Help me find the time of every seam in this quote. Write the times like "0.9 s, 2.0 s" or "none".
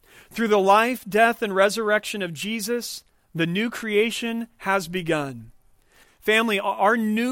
6.0 s